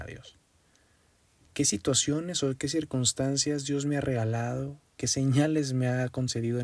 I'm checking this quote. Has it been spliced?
yes; 1 cut; at 1.4 s

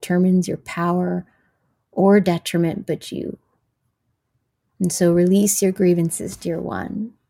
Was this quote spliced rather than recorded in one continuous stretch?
no; 0 cuts

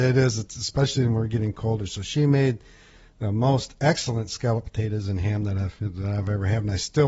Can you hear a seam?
no; 0 cuts

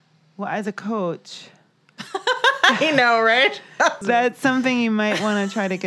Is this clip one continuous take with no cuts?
no; 1 cut; at 4.0 s

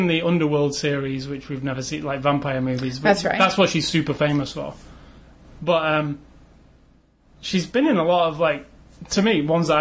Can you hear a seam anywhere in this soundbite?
no; 0 cuts

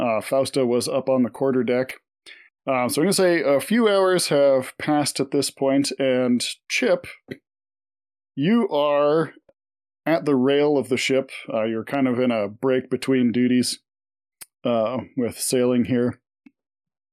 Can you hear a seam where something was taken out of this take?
no; 0 cuts

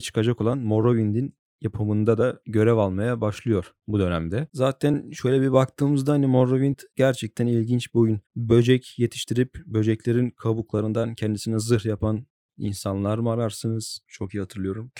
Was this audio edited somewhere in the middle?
yes; 2 cuts; at 8.3 s, 14.0 s

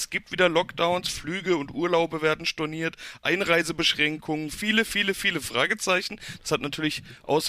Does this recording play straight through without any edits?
yes; 0 cuts

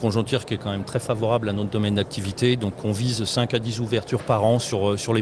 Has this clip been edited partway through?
no; 0 cuts

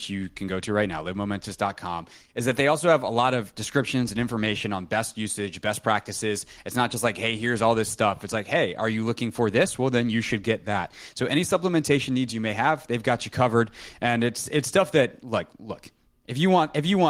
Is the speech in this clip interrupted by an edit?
no; 0 cuts

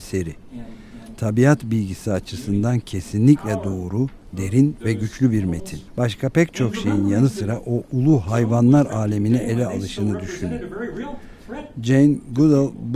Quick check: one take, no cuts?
no; 1 cut; at 5.9 s

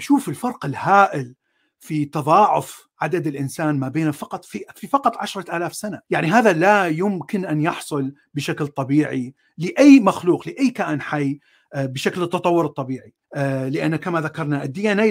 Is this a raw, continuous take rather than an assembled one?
no; 2 cuts; at 6.0 s, 13.2 s

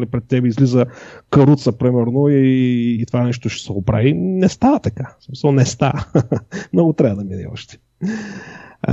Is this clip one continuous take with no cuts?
yes; 0 cuts

